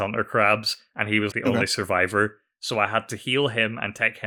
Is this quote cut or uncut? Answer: cut